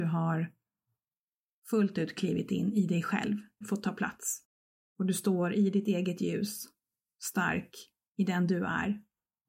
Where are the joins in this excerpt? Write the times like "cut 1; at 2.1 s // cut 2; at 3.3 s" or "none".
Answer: cut 1; at 3.6 s